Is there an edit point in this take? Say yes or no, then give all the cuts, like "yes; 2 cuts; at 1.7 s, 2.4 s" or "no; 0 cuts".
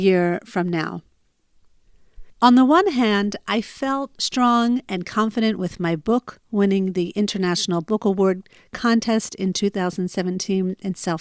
yes; 1 cut; at 2.3 s